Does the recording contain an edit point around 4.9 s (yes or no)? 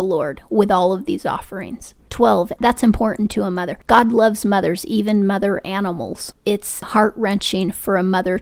no